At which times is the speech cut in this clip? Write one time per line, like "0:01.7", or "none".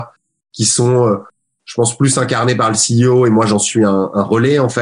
none